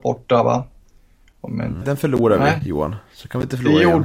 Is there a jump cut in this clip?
yes; 1 cut; at 1.8 s

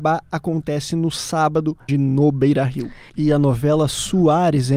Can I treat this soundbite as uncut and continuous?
no; 2 cuts; at 1.9 s, 3.1 s

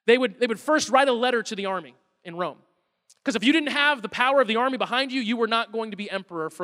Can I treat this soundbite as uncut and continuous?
yes; 0 cuts

